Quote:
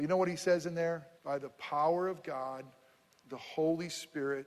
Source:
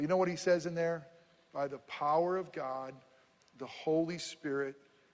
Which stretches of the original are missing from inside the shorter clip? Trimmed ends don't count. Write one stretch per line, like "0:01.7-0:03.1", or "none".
0:01.2-0:01.4